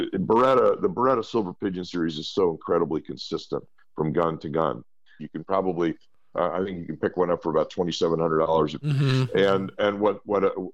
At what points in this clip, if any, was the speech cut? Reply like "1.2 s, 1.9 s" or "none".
5.2 s, 8.8 s

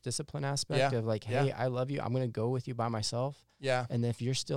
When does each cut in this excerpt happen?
none

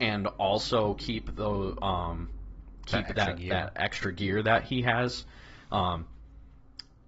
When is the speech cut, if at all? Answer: none

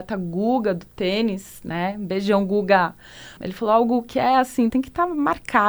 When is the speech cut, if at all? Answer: 3.4 s, 4.7 s

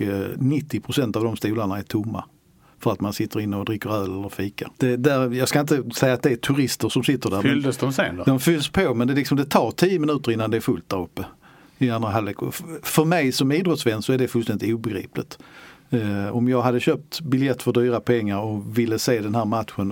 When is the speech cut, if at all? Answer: 4.7 s

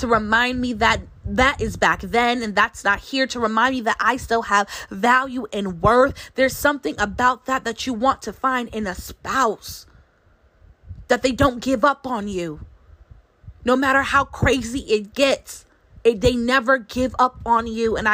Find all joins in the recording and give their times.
none

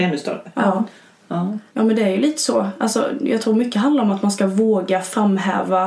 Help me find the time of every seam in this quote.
1.7 s

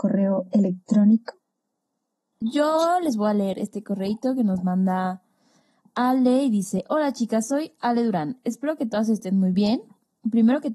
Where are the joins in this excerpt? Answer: 2.2 s

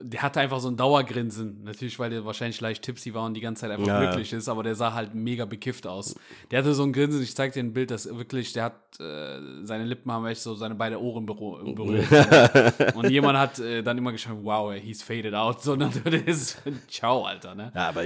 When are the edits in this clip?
none

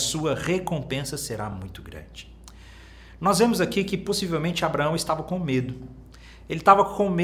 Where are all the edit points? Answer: none

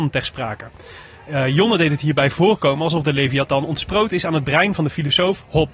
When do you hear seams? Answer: none

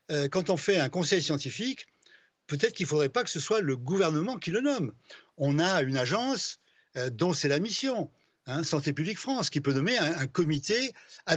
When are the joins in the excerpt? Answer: 10.1 s

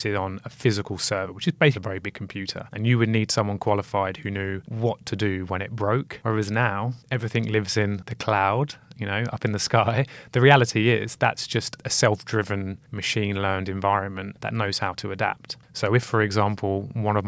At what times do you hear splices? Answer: 1.7 s

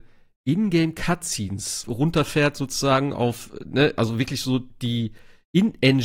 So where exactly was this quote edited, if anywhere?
1.8 s

